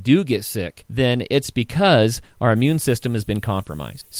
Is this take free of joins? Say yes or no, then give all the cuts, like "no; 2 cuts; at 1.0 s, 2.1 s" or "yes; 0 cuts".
yes; 0 cuts